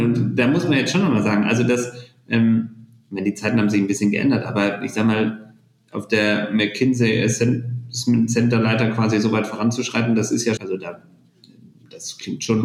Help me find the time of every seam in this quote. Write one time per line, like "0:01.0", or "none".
0:10.6